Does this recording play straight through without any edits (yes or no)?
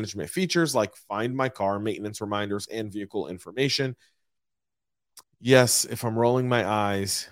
no